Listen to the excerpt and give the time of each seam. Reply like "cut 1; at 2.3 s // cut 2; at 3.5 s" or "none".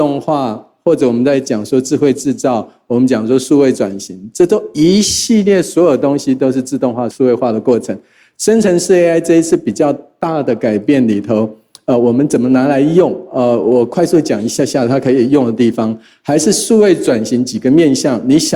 cut 1; at 8.3 s